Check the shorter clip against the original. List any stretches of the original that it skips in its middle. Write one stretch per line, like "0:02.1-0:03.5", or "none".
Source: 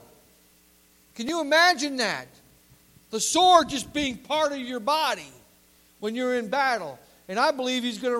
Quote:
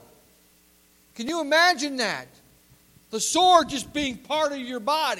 none